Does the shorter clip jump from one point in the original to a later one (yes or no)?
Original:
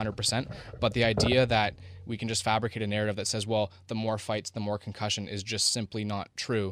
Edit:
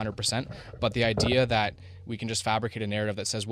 no